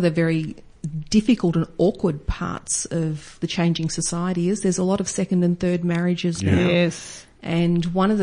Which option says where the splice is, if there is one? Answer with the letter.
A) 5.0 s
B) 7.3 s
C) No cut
C